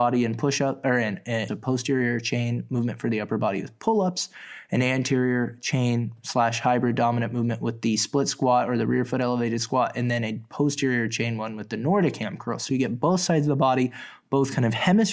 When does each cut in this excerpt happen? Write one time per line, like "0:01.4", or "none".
0:01.5